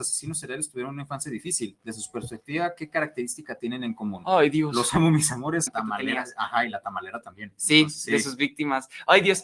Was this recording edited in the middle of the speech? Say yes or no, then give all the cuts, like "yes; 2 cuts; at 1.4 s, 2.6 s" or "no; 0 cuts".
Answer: yes; 1 cut; at 5.7 s